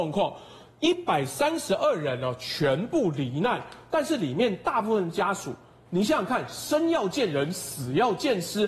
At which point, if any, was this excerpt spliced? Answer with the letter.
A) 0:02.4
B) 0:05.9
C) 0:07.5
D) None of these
B